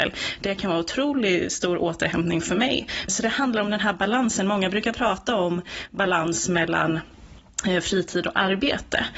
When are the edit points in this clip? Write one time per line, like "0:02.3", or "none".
0:03.1